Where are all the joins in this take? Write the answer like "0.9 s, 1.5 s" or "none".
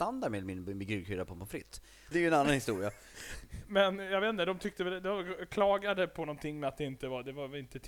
2.1 s